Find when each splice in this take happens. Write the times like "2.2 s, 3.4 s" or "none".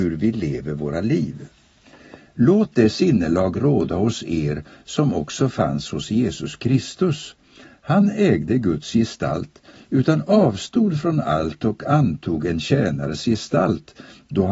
9.8 s